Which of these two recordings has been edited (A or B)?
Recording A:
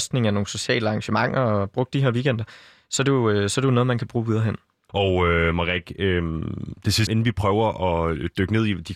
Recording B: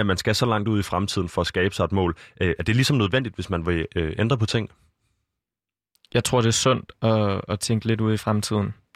A